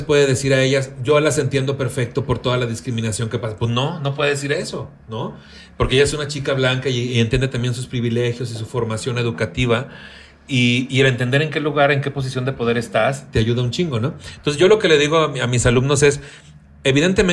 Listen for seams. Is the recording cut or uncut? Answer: uncut